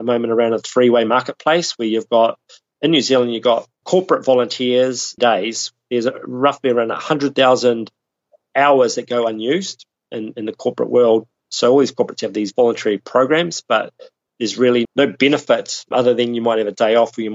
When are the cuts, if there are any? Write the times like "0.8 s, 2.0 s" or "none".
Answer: 5.2 s, 14.9 s